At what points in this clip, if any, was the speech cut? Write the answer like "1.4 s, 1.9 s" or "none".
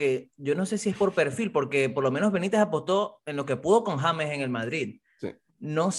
none